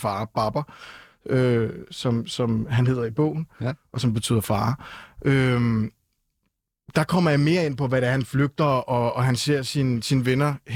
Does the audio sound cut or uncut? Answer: uncut